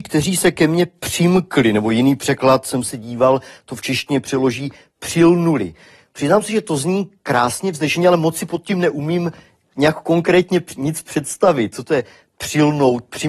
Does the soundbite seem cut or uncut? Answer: uncut